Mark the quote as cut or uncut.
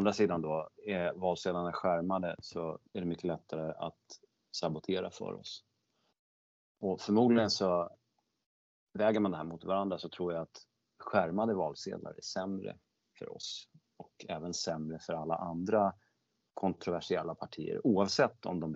cut